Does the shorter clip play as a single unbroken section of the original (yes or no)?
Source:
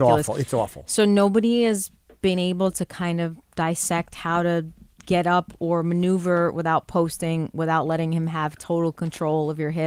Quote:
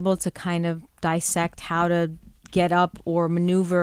yes